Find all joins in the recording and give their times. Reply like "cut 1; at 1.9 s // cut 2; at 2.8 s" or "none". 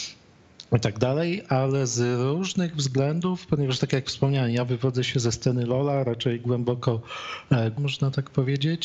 cut 1; at 7.8 s

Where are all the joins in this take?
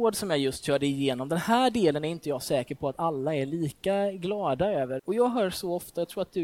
cut 1; at 5.0 s

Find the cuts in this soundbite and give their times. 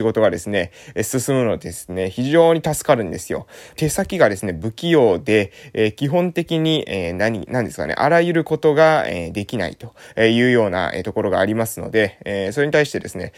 cut 1; at 3.8 s

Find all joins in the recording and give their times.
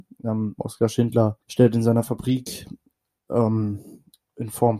cut 1; at 1.4 s

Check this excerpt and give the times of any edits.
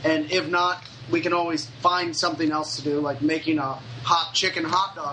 none

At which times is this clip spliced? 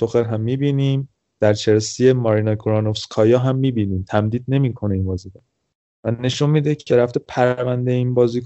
cut 1; at 6.9 s

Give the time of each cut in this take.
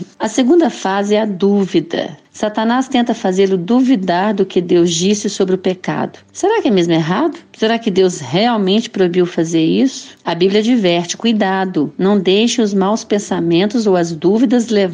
none

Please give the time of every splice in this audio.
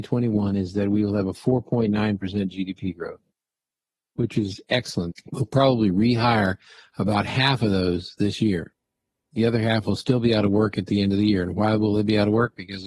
cut 1; at 5.1 s

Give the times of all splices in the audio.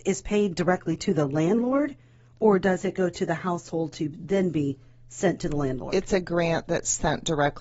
none

